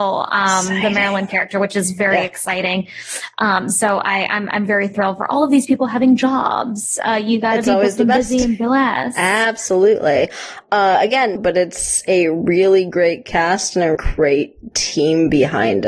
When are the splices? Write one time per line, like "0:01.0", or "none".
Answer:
0:11.4
0:14.0